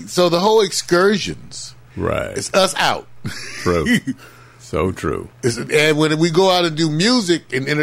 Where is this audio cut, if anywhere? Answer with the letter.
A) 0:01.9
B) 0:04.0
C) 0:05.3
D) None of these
A